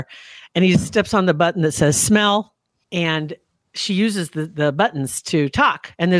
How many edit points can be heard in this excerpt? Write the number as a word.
one